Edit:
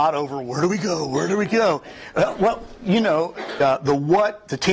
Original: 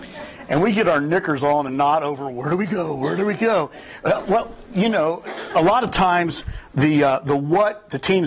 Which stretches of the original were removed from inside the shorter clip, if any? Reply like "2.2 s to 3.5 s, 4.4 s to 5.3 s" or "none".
5.5 s to 7.0 s